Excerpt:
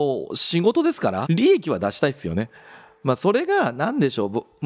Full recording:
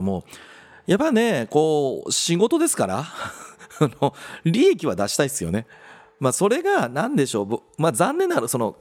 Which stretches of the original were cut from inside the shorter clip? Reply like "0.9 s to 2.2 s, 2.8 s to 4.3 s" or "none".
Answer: 3.0 s to 4.4 s